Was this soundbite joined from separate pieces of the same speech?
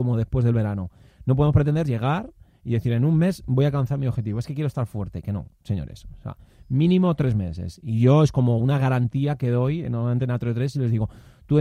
no; 0 cuts

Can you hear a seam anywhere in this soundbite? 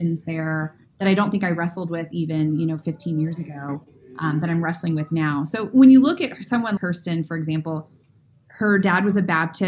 yes; 1 cut; at 6.8 s

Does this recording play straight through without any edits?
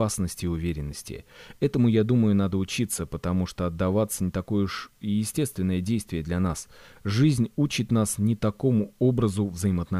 yes; 0 cuts

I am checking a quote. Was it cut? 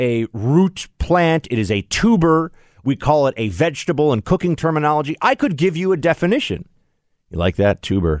no; 0 cuts

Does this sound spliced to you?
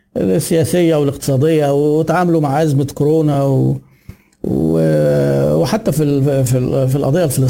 no; 0 cuts

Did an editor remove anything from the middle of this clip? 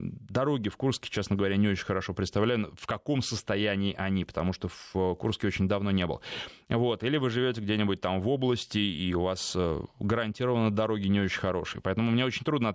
no; 0 cuts

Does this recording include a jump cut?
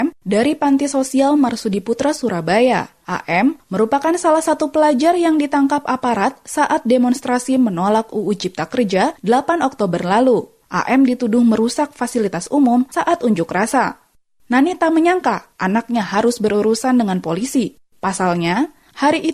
no; 0 cuts

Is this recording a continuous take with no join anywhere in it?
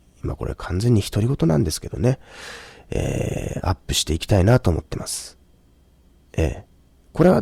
yes; 0 cuts

